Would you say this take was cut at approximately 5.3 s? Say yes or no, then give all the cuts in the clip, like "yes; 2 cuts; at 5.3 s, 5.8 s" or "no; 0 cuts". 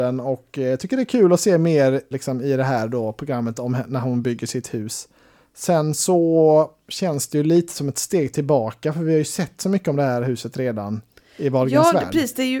no; 1 cut; at 2.1 s